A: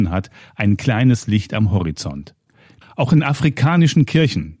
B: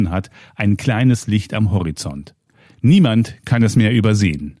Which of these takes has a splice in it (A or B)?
A